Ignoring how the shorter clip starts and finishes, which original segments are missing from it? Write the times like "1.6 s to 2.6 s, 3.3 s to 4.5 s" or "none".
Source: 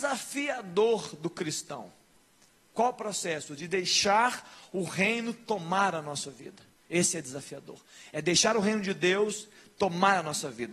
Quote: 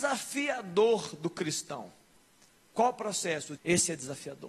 3.6 s to 6.8 s